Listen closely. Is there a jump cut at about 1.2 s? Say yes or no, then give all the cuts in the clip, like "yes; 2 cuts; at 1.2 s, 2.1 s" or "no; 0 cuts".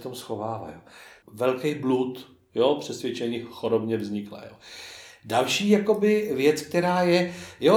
yes; 1 cut; at 1.2 s